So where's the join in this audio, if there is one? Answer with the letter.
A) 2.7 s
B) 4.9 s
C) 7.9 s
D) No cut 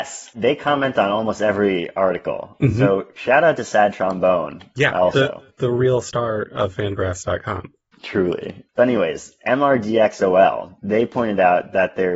D